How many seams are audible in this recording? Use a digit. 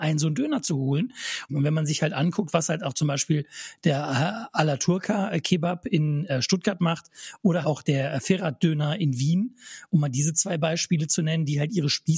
2